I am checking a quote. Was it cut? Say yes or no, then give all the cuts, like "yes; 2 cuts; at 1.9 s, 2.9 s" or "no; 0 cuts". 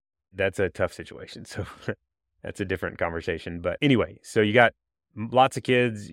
no; 0 cuts